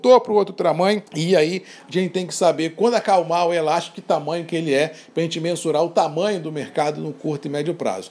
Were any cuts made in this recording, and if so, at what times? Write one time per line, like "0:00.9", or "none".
0:01.1